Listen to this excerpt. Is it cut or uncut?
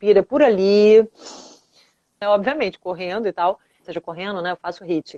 cut